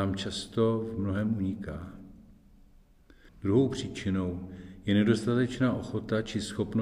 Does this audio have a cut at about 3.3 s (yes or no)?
yes